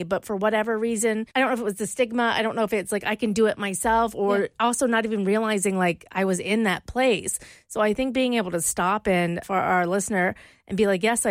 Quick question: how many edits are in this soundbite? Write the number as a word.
two